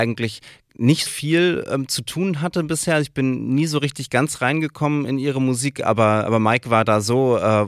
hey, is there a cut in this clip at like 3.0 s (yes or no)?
no